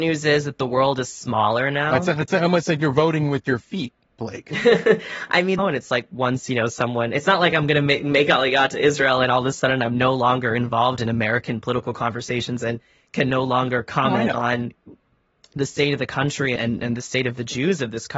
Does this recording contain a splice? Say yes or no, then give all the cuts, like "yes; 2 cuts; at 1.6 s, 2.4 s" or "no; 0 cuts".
yes; 2 cuts; at 5.6 s, 16.6 s